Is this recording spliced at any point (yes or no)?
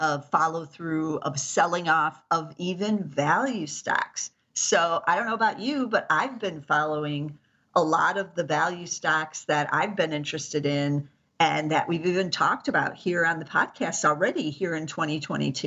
no